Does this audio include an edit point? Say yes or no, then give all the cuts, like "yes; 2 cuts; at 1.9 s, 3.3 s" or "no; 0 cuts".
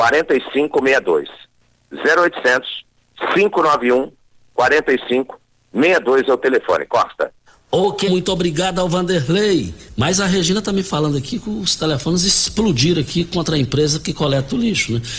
yes; 2 cuts; at 8.1 s, 9.9 s